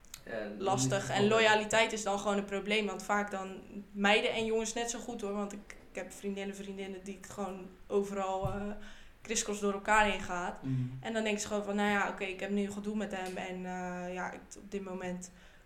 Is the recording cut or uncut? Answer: uncut